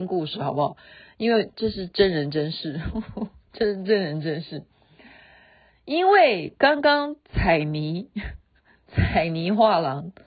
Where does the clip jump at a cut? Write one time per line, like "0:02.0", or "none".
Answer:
none